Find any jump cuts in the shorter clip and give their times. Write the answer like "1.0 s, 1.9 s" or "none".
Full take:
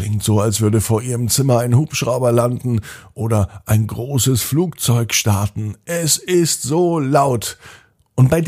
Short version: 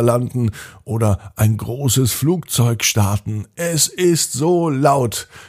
none